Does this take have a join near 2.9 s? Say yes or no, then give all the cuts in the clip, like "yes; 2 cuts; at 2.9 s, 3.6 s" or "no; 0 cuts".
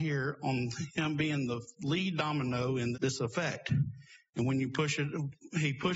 yes; 1 cut; at 2.9 s